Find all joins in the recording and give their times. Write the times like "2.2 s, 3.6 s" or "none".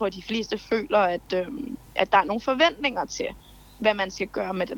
none

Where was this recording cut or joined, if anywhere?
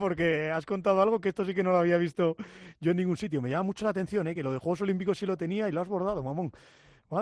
none

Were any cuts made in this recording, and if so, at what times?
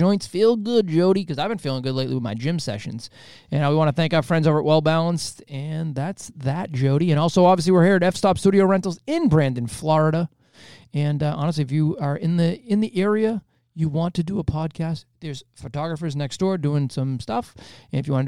none

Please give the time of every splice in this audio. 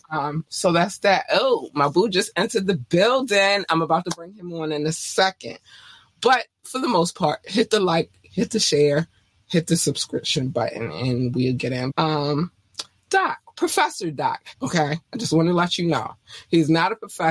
11.9 s, 14.5 s

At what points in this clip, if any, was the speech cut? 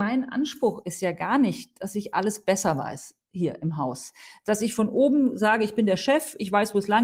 none

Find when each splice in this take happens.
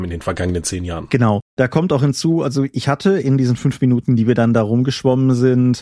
none

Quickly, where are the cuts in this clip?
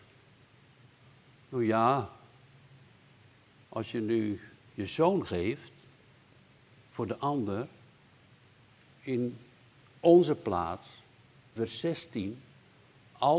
11.6 s

